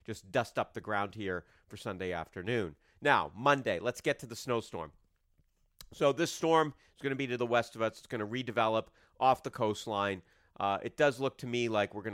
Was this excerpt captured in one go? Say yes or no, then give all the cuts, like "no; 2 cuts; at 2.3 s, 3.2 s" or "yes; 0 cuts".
yes; 0 cuts